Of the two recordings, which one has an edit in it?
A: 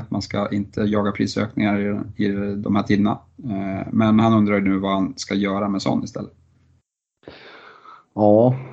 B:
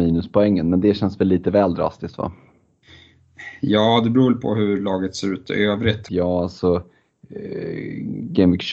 B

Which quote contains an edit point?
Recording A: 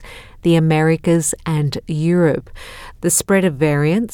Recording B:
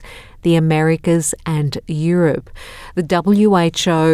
A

